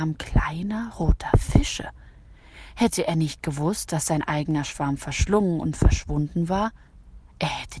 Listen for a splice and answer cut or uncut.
uncut